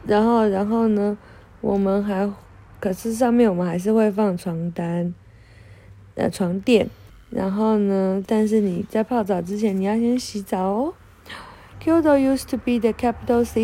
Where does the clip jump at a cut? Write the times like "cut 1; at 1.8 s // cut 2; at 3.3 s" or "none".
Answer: cut 1; at 7.1 s // cut 2; at 8.3 s // cut 3; at 11.7 s